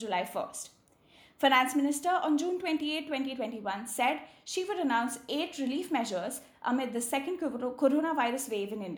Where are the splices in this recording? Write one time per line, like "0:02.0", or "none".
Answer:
none